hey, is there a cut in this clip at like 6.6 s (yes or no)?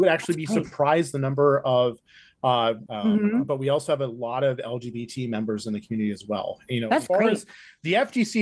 no